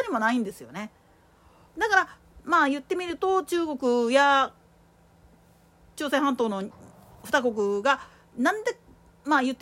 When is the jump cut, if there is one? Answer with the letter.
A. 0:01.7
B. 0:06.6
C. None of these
A